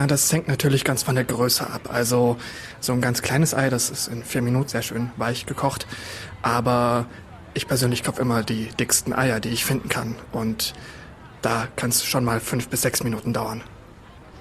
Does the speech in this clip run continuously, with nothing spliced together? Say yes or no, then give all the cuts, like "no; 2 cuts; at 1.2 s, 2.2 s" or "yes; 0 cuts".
no; 1 cut; at 4.7 s